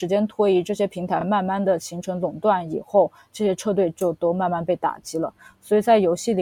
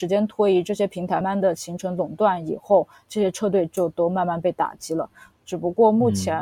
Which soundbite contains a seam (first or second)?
second